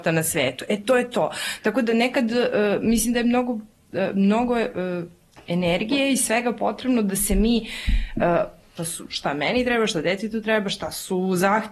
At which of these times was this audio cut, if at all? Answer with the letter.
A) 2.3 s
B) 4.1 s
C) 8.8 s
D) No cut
C